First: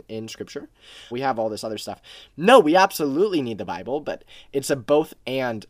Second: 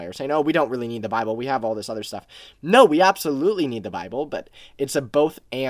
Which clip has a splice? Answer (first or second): first